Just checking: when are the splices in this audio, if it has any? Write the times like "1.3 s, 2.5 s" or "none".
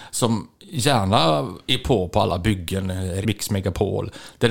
3.2 s